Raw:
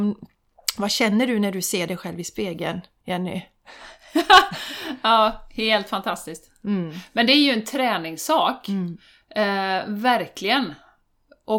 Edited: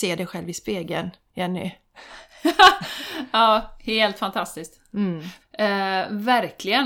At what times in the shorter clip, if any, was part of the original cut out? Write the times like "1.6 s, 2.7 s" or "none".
5.4 s